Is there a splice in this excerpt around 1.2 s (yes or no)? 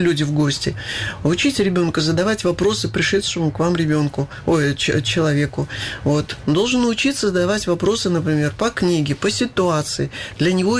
no